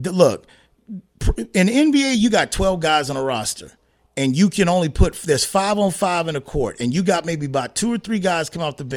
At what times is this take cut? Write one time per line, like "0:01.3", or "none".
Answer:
none